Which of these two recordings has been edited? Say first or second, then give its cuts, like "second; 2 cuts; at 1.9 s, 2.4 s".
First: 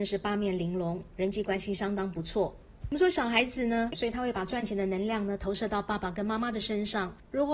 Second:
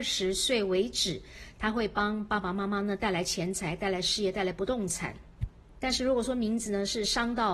first; 2 cuts; at 2.9 s, 3.9 s